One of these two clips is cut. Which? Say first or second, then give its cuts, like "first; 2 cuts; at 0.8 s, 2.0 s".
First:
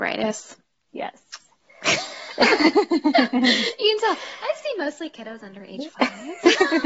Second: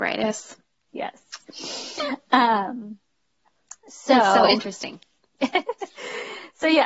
second; 1 cut; at 1.4 s